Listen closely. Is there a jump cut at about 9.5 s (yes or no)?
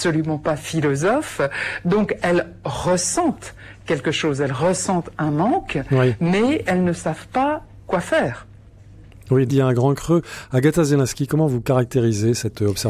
yes